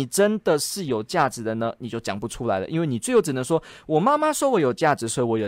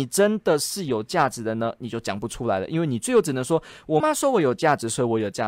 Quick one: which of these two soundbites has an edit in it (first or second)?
second